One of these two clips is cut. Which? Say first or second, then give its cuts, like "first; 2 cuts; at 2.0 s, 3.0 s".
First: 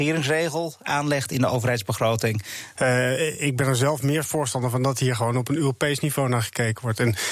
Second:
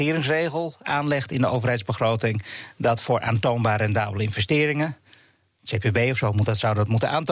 first; 1 cut; at 2.8 s